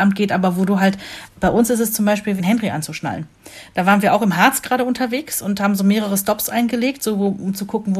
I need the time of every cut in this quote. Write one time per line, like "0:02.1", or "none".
0:01.3
0:02.4